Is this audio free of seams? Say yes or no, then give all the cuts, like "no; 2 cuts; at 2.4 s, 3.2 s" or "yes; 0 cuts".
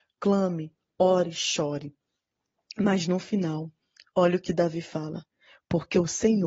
yes; 0 cuts